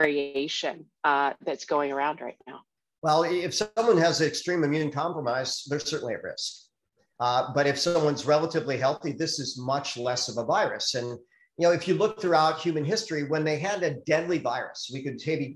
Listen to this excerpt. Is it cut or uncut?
uncut